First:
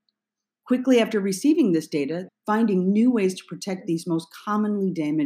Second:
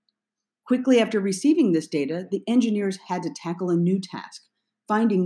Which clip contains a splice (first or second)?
first